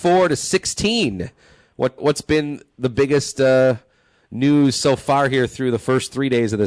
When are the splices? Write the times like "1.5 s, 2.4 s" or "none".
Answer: 2.0 s